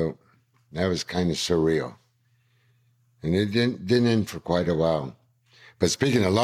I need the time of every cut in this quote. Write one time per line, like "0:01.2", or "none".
none